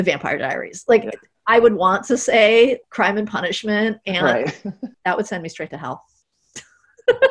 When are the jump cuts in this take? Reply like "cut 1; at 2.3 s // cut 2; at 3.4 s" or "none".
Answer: cut 1; at 2.8 s // cut 2; at 4.9 s